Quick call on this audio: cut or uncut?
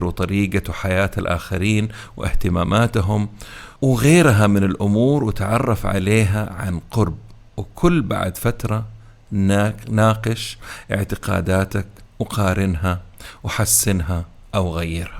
cut